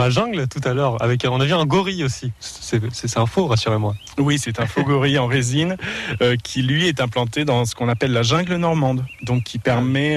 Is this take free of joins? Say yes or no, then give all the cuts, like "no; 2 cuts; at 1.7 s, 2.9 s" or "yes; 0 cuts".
yes; 0 cuts